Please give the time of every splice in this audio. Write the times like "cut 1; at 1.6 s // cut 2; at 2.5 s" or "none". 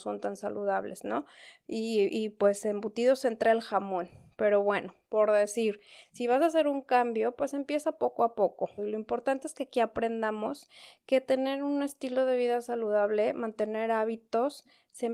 cut 1; at 8.8 s